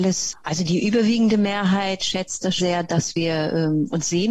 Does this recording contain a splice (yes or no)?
yes